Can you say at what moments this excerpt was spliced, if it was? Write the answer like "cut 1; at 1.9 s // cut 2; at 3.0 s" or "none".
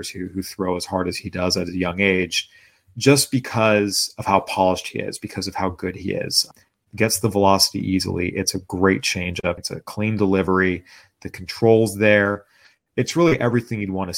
cut 1; at 9.6 s